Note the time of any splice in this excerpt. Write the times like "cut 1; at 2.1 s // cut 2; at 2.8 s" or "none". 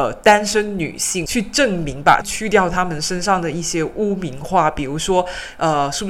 cut 1; at 2.2 s